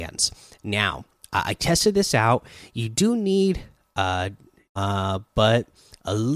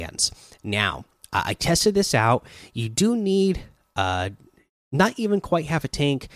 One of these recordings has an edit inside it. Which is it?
first; 1 cut; at 4.7 s

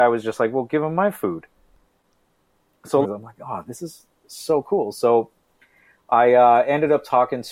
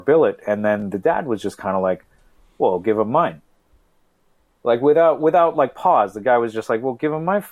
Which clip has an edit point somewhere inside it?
first; 1 cut; at 3.0 s

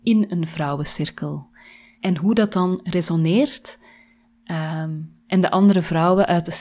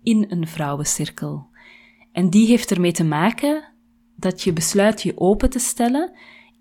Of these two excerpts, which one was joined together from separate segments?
first; 1 cut; at 1.9 s

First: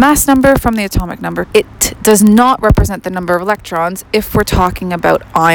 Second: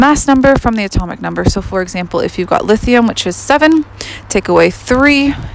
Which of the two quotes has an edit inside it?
first; 1 cut; at 1.4 s

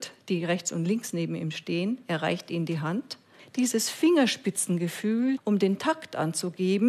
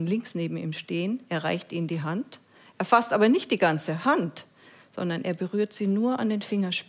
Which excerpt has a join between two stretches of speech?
first; 2 cuts; at 3.4 s, 5.4 s

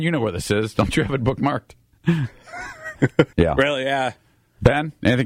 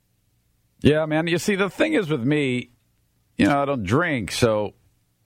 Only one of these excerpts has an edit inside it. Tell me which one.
first; 1 cut; at 3.3 s

